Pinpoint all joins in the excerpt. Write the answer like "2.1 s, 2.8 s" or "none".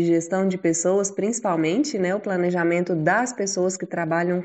none